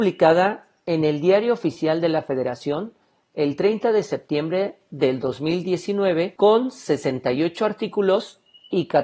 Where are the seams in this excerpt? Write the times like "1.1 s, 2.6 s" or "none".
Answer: none